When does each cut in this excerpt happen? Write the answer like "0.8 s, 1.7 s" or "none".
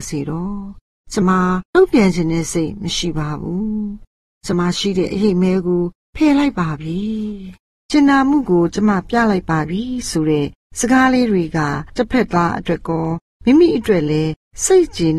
1.2 s, 4.5 s